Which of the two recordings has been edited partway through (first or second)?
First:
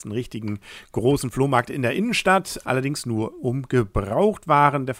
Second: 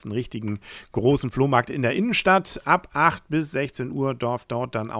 first